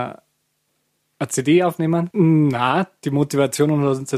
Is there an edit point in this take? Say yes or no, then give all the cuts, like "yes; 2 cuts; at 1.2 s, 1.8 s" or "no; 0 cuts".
yes; 1 cut; at 2.1 s